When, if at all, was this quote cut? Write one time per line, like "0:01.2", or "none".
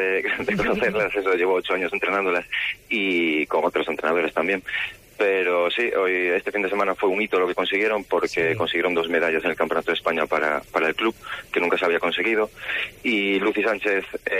none